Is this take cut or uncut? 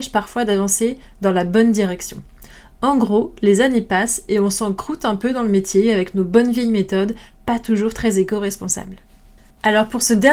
uncut